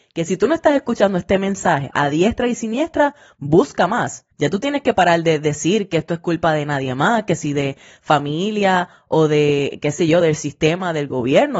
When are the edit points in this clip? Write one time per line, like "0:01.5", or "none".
0:04.3
0:10.2

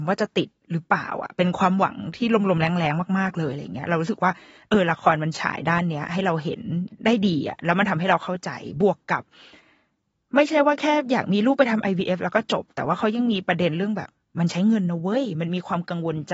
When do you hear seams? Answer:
none

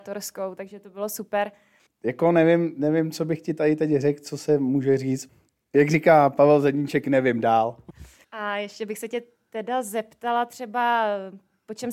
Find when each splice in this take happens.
0:01.9
0:08.2

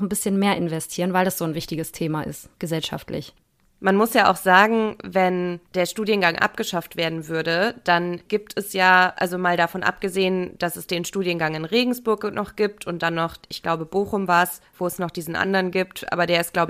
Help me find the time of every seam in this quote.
none

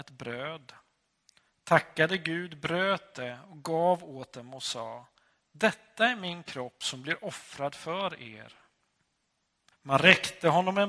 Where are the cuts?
0:09.7

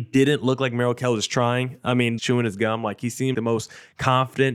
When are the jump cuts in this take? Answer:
0:02.2
0:03.3

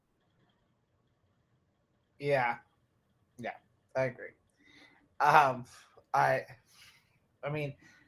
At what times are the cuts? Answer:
0:03.3

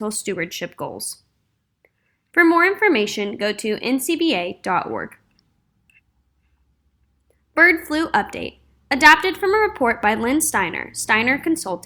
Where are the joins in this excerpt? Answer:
none

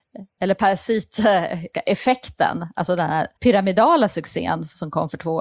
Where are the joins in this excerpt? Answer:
0:01.7
0:03.4

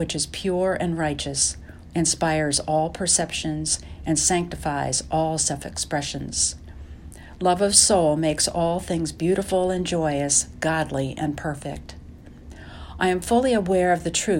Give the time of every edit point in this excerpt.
0:01.9

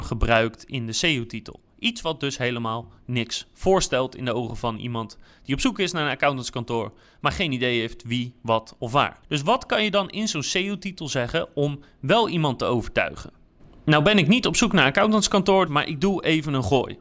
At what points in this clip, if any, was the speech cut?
0:15.7

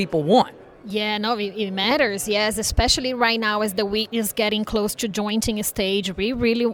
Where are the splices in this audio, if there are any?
none

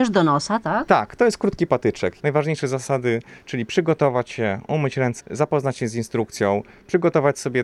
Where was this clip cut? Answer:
0:02.2
0:05.2

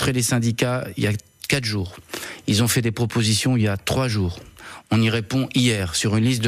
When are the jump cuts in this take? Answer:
none

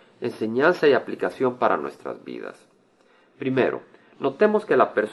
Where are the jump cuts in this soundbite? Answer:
none

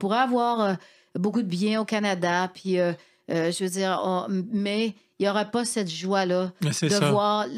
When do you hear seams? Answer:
none

